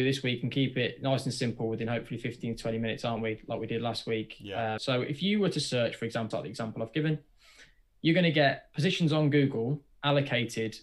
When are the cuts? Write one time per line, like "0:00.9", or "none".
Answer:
0:04.8
0:06.3